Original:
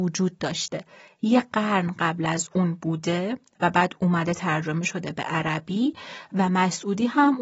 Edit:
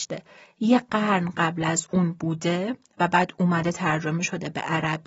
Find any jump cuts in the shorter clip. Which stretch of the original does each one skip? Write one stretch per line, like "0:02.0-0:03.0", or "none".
none